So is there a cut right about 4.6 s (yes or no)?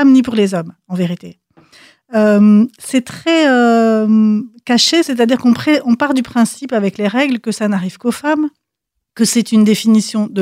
no